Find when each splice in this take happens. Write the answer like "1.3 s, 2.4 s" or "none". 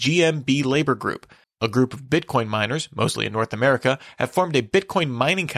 1.4 s